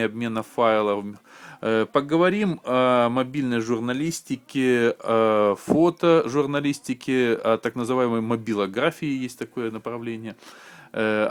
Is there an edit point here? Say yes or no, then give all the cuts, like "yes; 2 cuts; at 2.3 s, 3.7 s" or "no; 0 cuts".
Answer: no; 0 cuts